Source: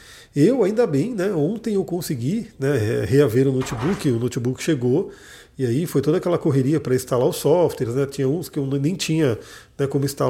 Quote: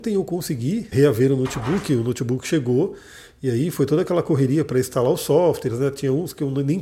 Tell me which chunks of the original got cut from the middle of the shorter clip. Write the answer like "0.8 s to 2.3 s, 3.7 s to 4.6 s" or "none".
2.5 s to 3.1 s